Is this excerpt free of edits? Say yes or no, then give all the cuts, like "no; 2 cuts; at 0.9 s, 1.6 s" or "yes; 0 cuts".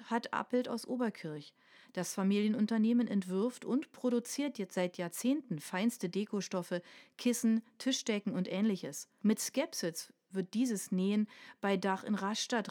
no; 1 cut; at 9.2 s